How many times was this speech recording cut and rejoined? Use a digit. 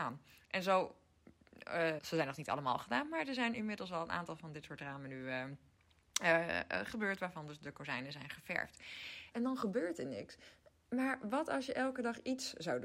2